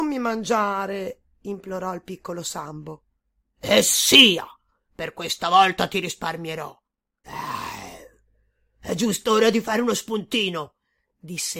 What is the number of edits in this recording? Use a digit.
1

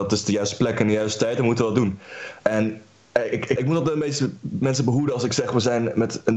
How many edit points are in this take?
2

